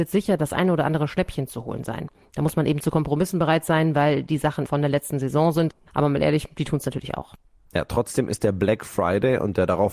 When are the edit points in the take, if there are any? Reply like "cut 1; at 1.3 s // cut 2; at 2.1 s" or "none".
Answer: cut 1; at 4.7 s